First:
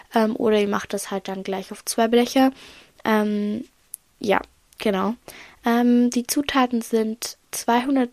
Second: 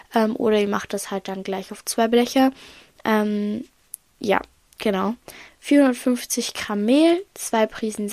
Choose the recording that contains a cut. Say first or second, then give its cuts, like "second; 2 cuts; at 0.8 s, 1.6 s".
second; 1 cut; at 5.5 s